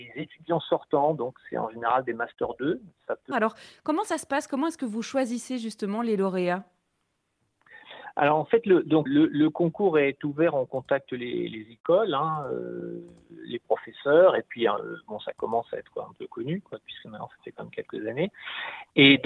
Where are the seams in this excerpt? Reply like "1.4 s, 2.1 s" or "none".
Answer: 3.3 s, 9.1 s